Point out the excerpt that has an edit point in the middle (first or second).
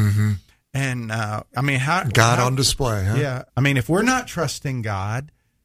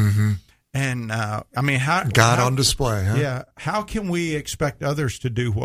first